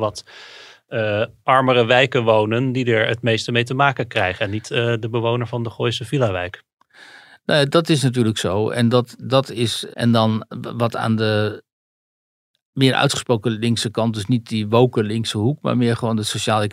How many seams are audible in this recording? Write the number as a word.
one